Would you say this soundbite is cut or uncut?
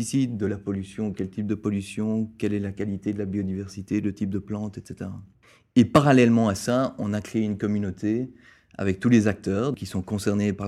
uncut